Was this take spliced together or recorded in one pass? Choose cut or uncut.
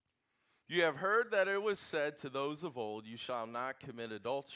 uncut